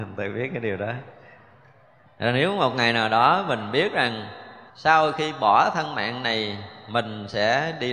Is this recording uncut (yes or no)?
no